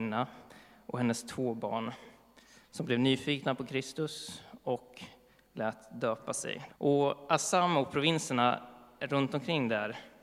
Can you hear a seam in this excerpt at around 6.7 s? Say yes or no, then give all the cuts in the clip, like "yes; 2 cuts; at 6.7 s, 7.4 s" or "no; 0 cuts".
yes; 1 cut; at 6.7 s